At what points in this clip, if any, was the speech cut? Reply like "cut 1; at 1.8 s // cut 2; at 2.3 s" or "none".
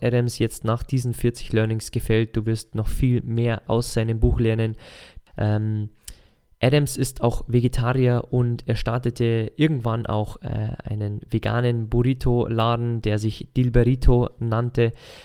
cut 1; at 5.3 s